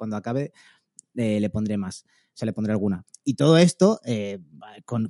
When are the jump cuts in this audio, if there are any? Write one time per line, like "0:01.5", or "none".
0:03.1